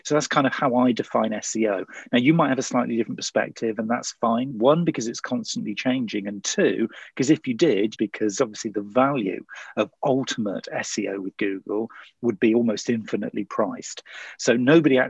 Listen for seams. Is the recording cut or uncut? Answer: cut